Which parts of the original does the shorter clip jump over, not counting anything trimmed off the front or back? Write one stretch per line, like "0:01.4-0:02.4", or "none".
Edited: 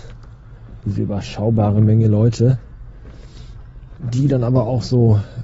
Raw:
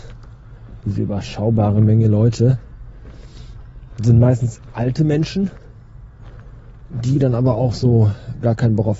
0:04.0-0:06.9